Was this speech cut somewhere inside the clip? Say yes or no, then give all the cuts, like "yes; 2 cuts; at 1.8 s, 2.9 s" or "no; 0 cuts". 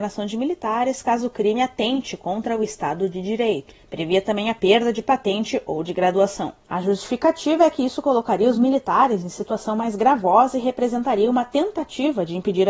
no; 0 cuts